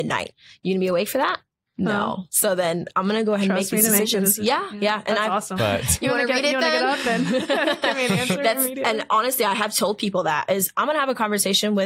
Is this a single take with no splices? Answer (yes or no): no